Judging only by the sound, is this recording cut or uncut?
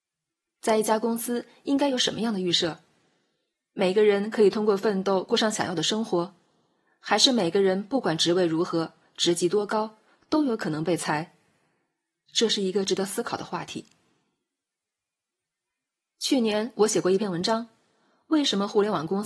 uncut